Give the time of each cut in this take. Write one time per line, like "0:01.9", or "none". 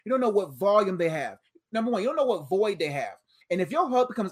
0:03.4